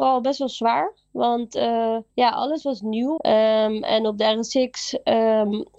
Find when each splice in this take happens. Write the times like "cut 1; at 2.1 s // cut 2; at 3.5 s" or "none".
cut 1; at 2.1 s // cut 2; at 3.2 s